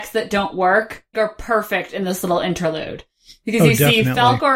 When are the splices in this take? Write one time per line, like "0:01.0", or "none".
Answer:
0:01.1